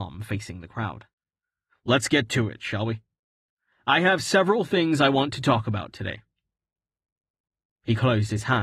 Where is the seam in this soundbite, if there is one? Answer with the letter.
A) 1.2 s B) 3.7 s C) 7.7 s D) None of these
D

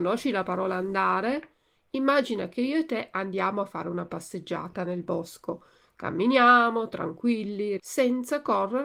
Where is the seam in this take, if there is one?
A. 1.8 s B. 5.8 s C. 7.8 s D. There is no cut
C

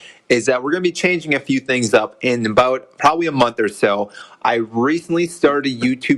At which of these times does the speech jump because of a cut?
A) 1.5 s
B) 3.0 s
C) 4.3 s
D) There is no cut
D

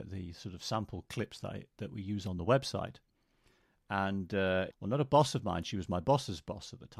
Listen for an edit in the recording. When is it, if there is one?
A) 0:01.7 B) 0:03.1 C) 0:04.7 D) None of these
C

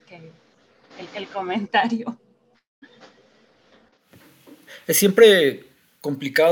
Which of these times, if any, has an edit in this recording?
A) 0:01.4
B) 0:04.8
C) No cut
C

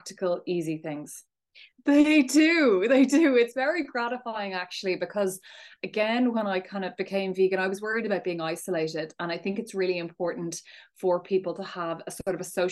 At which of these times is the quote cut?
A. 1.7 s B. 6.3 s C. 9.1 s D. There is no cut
A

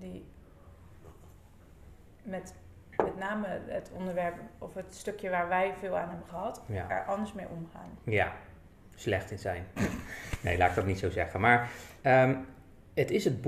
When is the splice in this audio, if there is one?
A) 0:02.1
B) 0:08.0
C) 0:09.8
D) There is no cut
C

